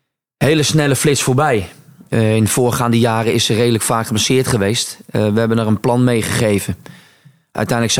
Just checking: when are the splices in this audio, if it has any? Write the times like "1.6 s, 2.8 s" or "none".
none